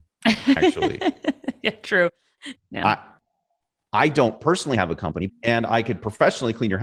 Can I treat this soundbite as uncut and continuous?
no; 2 cuts; at 2.5 s, 5.3 s

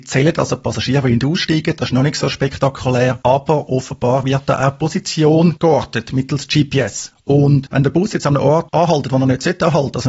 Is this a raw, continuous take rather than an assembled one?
yes; 0 cuts

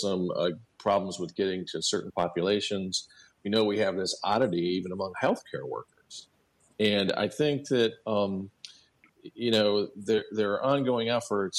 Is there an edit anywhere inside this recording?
no; 0 cuts

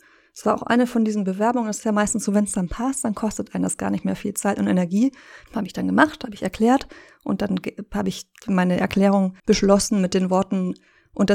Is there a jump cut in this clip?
yes; 2 cuts; at 5.5 s, 9.4 s

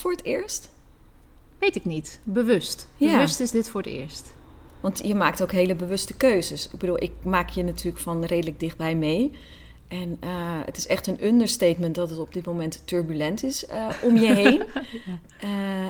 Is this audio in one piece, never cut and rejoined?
yes; 0 cuts

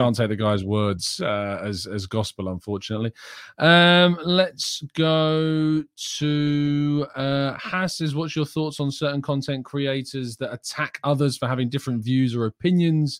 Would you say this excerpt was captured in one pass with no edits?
yes; 0 cuts

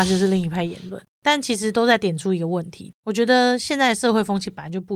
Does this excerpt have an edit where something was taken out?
no; 0 cuts

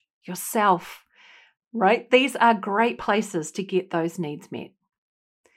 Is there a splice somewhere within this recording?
yes; 1 cut; at 1.6 s

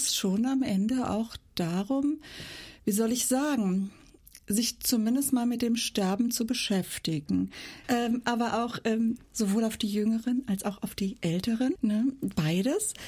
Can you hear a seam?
yes; 3 cuts; at 7.8 s, 9.2 s, 11.8 s

